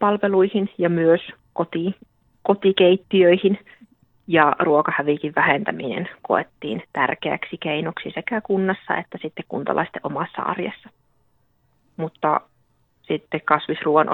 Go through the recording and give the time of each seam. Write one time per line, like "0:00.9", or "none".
none